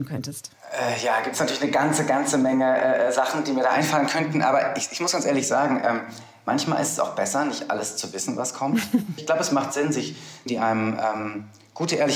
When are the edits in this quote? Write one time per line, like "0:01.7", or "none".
0:09.2
0:10.5